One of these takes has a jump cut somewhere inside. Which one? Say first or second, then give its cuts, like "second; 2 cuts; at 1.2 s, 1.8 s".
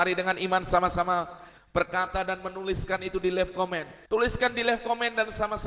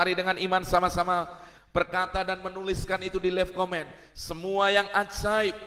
first; 1 cut; at 4.1 s